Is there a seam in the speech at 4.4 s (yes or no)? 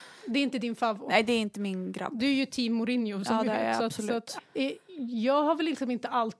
yes